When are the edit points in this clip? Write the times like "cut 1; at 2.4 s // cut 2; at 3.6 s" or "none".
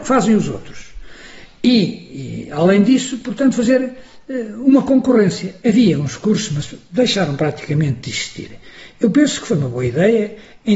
none